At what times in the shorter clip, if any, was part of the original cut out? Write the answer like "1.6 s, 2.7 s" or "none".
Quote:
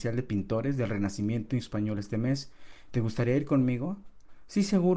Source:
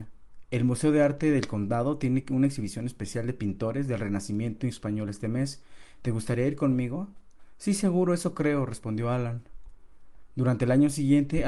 none